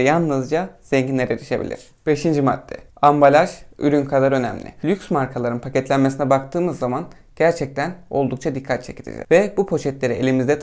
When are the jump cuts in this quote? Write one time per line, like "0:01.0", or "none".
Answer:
0:02.9